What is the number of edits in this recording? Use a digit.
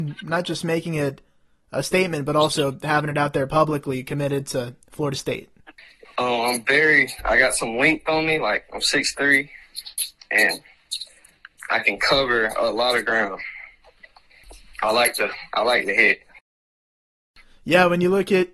1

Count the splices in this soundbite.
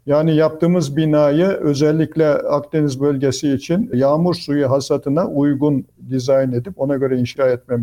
0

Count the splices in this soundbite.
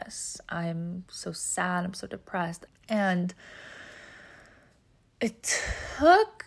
1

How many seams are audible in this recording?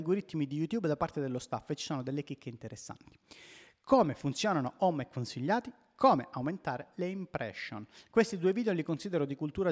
0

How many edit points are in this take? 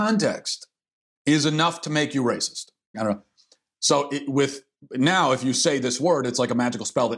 1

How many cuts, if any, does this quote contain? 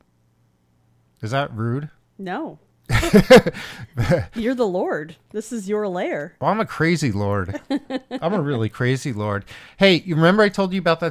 0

